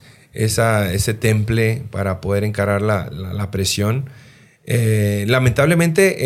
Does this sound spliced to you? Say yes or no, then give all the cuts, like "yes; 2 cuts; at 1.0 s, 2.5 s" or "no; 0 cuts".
no; 0 cuts